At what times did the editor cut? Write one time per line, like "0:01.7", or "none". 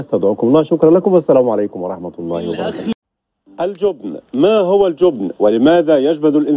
none